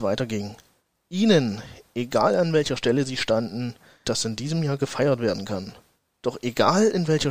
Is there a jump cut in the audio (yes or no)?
yes